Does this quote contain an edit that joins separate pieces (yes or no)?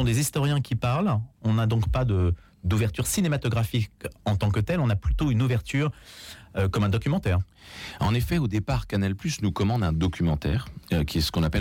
no